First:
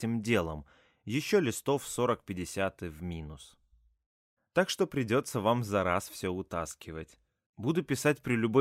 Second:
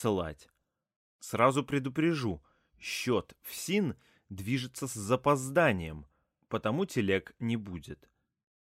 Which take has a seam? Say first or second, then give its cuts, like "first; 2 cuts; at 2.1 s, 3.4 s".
first; 2 cuts; at 4.4 s, 7.5 s